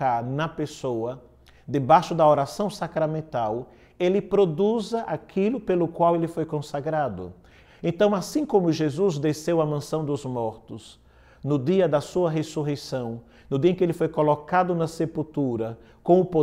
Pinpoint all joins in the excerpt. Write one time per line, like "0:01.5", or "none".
0:07.7